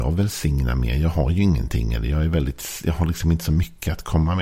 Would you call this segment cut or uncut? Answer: uncut